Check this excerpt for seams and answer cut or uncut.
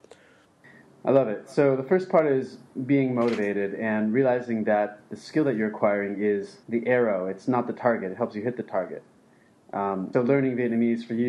cut